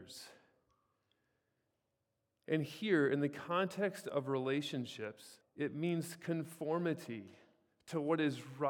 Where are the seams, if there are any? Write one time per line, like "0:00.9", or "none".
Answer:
0:05.4